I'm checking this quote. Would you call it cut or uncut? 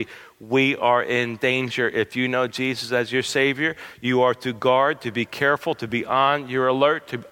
uncut